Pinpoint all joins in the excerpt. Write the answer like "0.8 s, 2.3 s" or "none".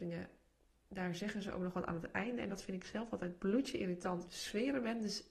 4.3 s